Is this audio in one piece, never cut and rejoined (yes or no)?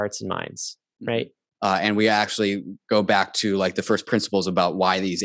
no